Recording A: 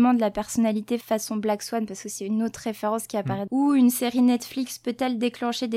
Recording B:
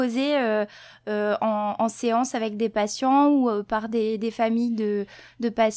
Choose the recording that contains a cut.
A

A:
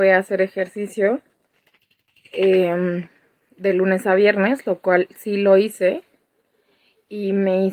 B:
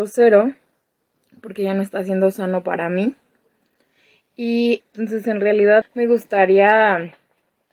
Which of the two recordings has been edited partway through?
B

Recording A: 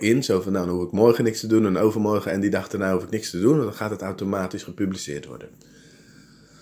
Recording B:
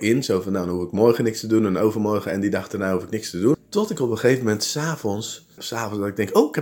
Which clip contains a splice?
B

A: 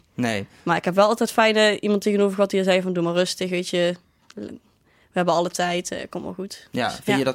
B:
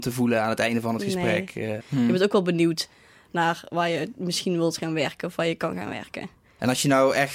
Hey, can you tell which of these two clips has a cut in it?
B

